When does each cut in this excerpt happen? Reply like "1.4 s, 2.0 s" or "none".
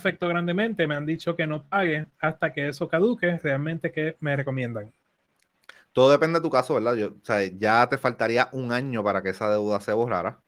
none